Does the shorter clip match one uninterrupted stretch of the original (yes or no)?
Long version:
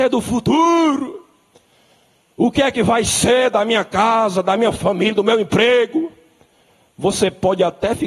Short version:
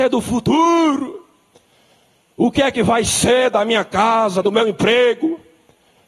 no